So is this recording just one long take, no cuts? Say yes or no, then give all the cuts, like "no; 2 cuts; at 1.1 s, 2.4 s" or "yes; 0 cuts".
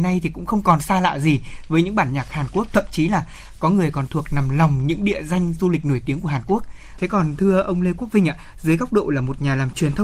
no; 1 cut; at 7.0 s